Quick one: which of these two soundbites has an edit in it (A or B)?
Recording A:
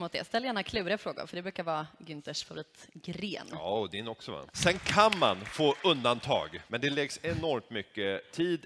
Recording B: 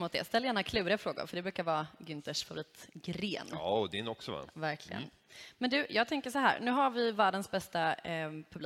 A